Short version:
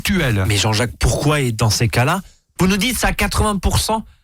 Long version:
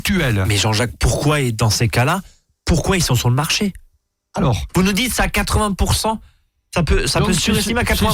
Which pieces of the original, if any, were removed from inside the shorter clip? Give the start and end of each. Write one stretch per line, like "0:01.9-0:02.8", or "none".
0:02.6-0:04.7